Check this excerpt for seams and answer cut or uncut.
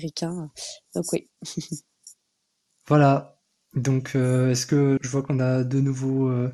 cut